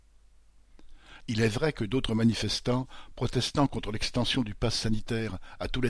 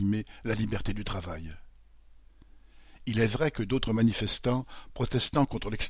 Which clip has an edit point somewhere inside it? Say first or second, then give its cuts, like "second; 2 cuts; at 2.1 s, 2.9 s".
first; 1 cut; at 1.2 s